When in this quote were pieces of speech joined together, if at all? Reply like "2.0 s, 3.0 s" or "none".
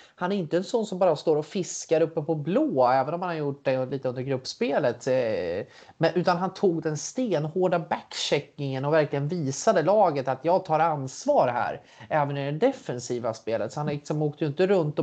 none